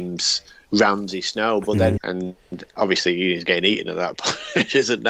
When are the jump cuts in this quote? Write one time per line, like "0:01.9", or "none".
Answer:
0:02.0